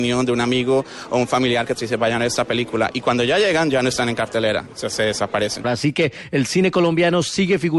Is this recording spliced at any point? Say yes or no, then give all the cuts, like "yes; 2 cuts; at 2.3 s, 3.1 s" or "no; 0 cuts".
yes; 1 cut; at 5.6 s